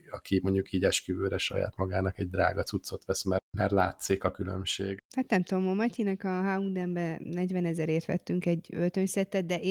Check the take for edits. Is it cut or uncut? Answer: uncut